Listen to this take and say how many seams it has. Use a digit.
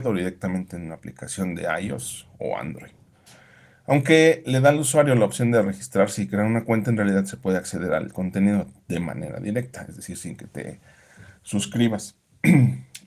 0